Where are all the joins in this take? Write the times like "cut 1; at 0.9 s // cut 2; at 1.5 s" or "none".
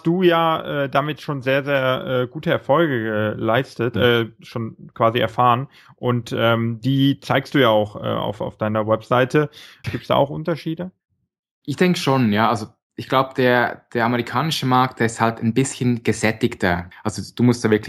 cut 1; at 9.8 s // cut 2; at 16.9 s